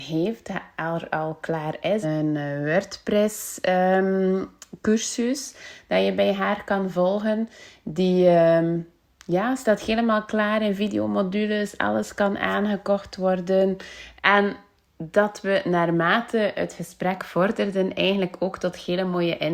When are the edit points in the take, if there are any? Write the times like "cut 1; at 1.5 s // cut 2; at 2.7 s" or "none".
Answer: cut 1; at 2.0 s // cut 2; at 14.2 s